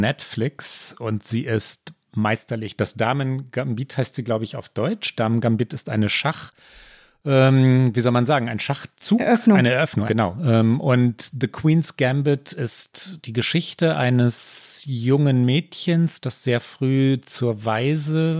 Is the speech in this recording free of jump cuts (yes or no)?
no